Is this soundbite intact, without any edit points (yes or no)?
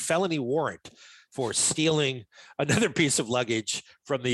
yes